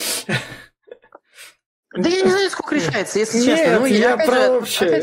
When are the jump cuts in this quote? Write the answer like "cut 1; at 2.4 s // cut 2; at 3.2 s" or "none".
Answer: none